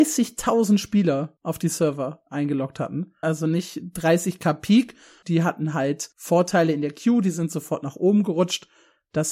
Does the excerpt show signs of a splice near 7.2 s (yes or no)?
no